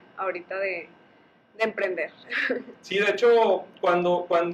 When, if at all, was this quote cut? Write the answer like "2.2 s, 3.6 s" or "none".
2.7 s